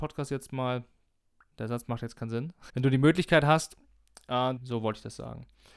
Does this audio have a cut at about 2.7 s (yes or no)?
yes